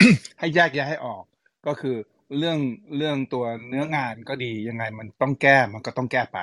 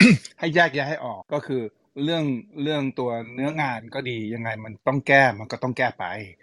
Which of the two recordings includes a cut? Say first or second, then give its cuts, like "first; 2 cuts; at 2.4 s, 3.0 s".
second; 1 cut; at 1.2 s